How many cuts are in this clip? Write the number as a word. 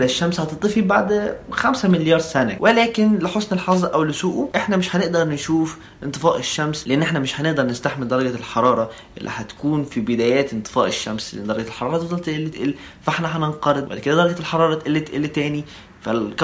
one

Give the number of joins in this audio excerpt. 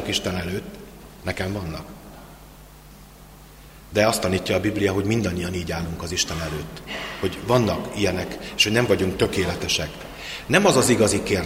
zero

